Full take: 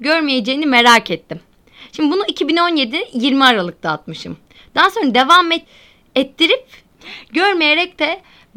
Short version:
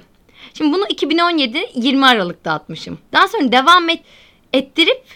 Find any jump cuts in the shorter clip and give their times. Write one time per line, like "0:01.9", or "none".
0:03.1